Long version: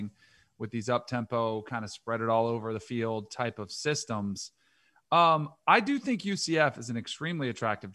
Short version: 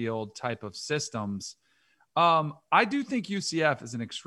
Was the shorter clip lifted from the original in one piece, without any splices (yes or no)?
yes